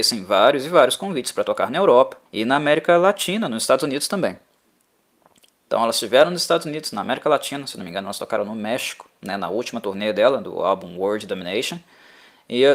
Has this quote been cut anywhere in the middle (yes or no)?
yes